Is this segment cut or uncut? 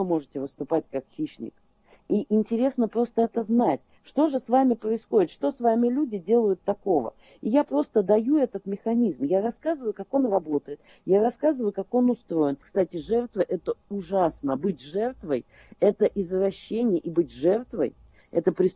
cut